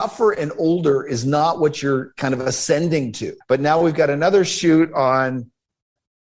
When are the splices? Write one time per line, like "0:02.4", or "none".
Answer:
0:03.4